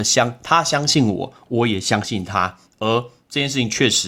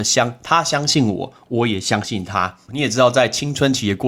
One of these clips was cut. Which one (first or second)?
second